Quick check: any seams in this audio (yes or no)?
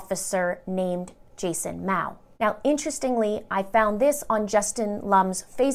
no